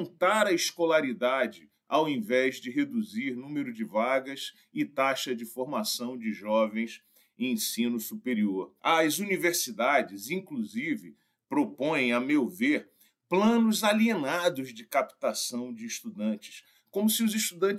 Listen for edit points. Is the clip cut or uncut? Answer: cut